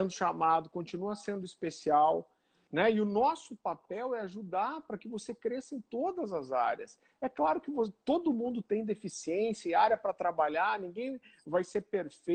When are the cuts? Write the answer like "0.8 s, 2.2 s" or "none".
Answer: 2.7 s